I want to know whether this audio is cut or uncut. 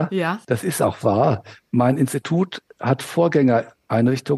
uncut